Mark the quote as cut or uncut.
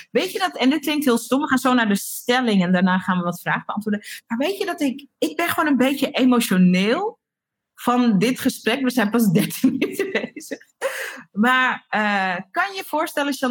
uncut